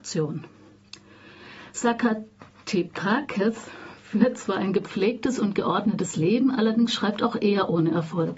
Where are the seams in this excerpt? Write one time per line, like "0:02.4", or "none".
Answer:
none

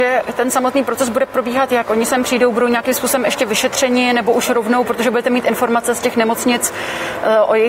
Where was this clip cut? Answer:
none

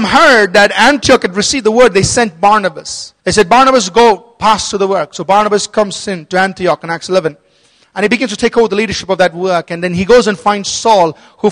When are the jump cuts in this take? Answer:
0:03.2

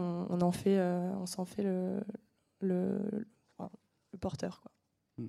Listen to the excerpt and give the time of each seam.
none

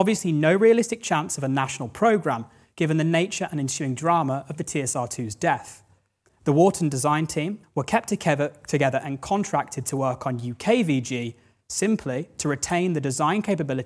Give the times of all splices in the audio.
0:06.3
0:07.6

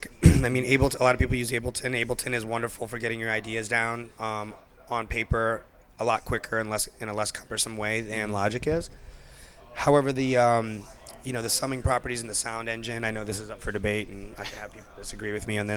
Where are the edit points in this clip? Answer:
none

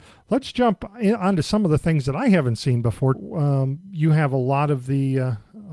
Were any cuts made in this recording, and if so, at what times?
0:03.1

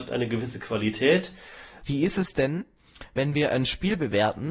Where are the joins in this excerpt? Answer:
0:01.8

